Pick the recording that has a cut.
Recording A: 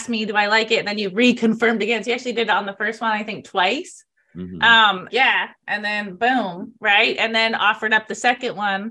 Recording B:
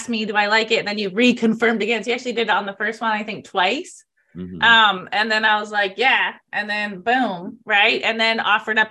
A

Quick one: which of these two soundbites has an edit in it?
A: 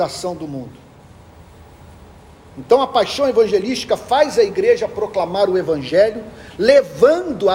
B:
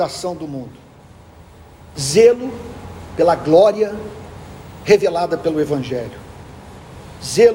B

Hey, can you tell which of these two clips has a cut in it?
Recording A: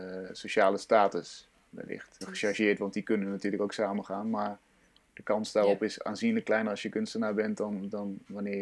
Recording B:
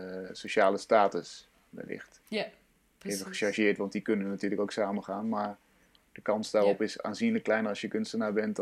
A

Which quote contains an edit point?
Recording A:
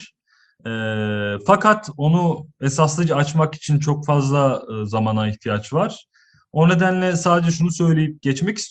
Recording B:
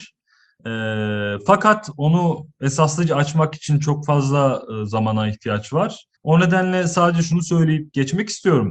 B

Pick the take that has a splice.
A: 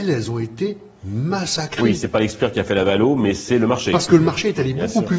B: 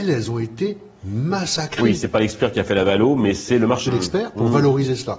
B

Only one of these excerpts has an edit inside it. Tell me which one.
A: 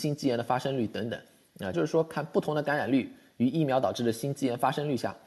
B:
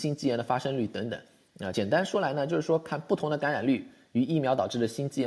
A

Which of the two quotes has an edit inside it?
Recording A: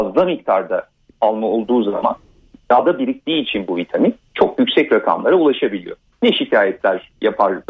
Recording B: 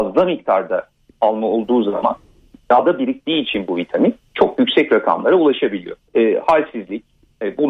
B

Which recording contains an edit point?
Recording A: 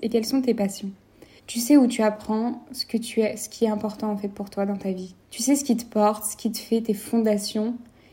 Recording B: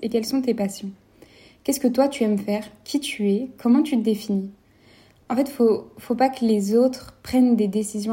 A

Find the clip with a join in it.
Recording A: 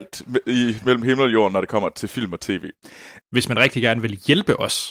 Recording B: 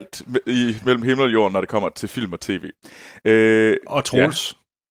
A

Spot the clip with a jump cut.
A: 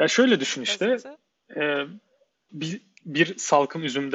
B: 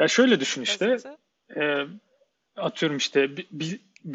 A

